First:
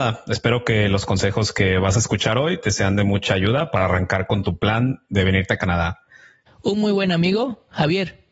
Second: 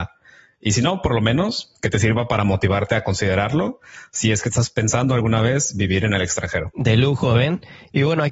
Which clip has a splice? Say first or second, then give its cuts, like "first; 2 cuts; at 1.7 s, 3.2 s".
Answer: first; 1 cut; at 6.5 s